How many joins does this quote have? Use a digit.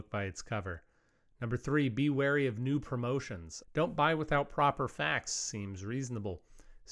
1